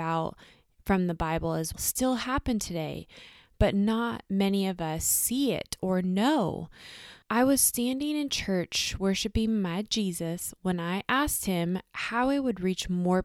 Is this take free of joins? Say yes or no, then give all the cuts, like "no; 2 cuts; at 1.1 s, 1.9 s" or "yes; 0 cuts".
no; 2 cuts; at 1.7 s, 7.2 s